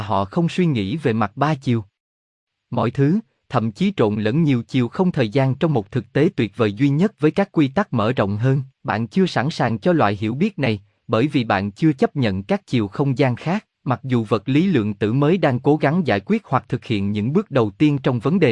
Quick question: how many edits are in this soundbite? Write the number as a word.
two